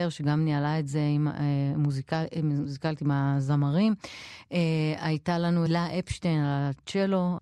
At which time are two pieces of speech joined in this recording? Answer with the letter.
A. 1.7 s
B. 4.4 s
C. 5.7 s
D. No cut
C